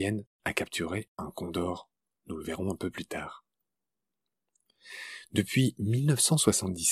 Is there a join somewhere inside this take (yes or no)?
no